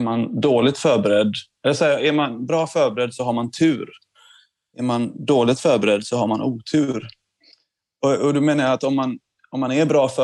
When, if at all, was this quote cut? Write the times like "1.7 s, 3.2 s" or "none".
none